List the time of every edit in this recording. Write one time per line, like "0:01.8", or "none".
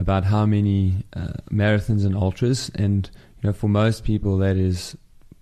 none